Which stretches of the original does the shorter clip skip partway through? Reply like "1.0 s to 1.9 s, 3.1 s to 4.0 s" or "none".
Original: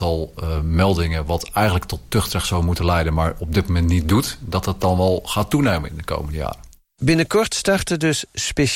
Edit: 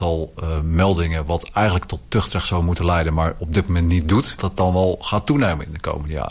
4.4 s to 4.6 s